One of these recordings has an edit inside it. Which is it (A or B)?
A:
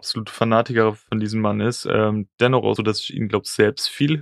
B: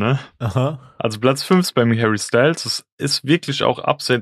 A